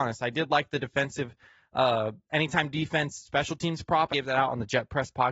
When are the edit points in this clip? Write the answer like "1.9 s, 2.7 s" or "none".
4.1 s